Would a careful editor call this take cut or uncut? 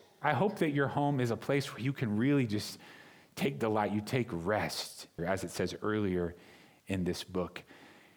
cut